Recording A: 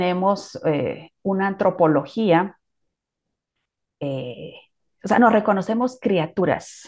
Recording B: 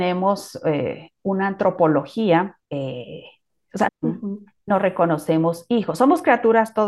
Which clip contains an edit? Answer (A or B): B